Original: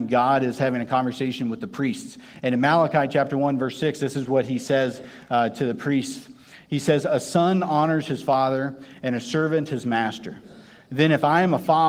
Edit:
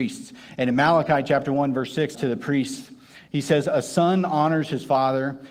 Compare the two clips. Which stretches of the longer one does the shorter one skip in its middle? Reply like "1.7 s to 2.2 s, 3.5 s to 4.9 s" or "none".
4.0 s to 5.5 s